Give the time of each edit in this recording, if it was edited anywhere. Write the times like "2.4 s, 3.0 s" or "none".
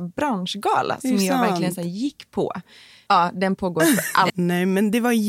3.1 s, 4.3 s